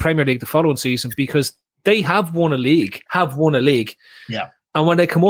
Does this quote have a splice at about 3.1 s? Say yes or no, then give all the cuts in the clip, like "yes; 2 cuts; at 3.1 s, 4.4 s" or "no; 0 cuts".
yes; 1 cut; at 3.1 s